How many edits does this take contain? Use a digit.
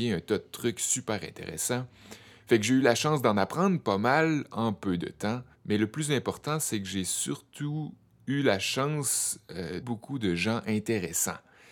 2